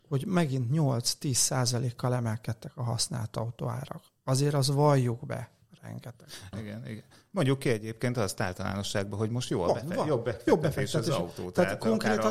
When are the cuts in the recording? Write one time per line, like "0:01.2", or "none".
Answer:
0:06.5